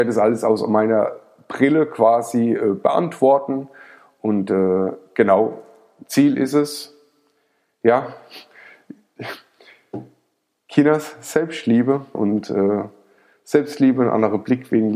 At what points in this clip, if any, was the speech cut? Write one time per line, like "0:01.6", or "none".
0:12.1